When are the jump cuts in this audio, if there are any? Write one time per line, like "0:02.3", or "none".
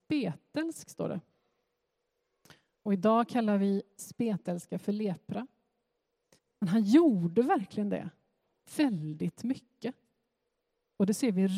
0:06.4